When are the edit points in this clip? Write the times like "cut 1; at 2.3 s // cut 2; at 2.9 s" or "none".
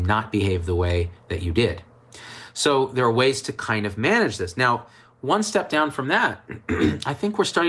none